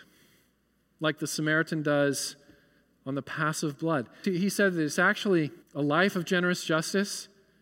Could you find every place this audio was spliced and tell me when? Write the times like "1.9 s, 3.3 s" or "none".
4.2 s, 5.6 s